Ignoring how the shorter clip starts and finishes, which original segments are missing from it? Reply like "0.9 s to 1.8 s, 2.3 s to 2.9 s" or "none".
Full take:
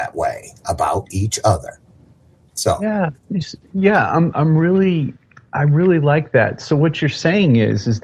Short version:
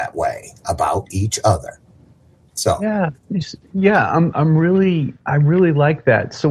5.2 s to 5.5 s